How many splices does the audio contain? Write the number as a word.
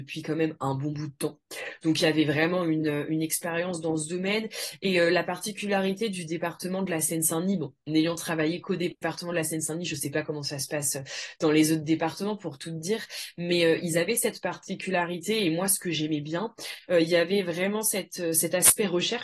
zero